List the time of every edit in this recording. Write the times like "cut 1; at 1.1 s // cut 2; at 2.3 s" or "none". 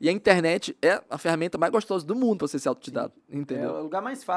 none